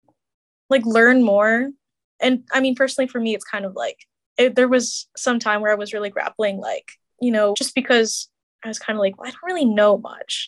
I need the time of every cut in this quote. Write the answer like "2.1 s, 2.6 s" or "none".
7.5 s